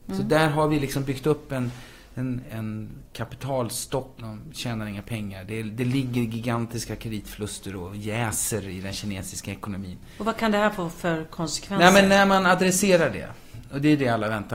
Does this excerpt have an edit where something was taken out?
yes; 2 cuts; at 2.4 s, 4.2 s

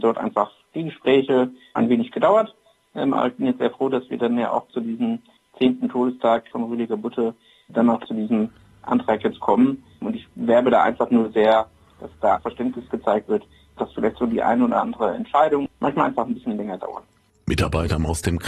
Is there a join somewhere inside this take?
no; 0 cuts

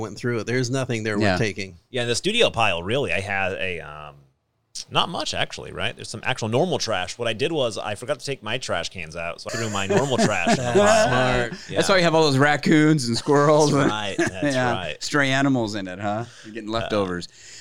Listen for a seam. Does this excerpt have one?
yes; 1 cut; at 9.5 s

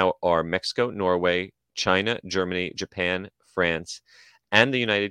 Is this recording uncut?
yes; 0 cuts

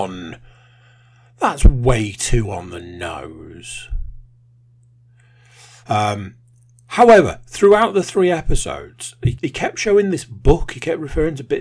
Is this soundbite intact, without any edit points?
no; 2 cuts; at 5.8 s, 9.3 s

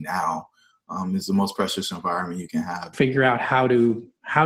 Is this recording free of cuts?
no; 1 cut; at 2.9 s

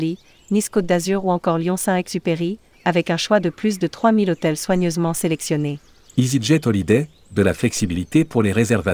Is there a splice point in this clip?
yes; 1 cut; at 2.7 s

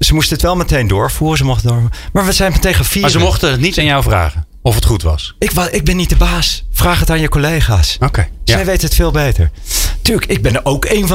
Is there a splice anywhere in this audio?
no; 0 cuts

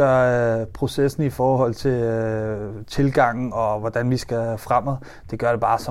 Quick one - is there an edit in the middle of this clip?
no; 0 cuts

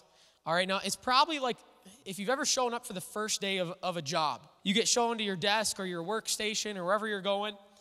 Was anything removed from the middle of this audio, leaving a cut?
yes; 1 cut; at 4.6 s

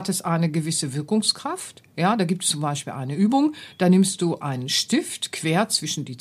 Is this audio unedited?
yes; 0 cuts

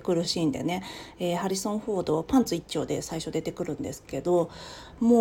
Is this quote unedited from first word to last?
yes; 0 cuts

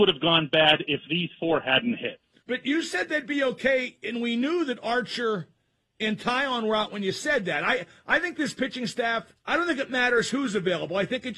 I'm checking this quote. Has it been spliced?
yes; 2 cuts; at 2.4 s, 9.4 s

